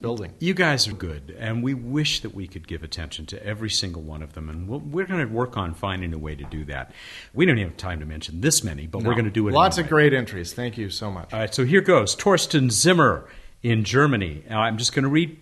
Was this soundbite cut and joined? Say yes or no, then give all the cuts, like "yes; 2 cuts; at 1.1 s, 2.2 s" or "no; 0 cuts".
yes; 2 cuts; at 0.9 s, 7.3 s